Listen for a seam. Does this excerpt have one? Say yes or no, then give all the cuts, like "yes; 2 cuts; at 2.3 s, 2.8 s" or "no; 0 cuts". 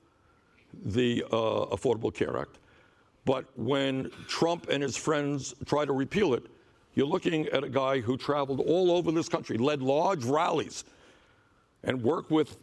no; 0 cuts